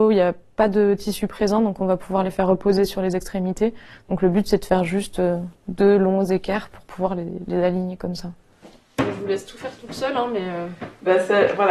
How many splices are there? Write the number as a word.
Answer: zero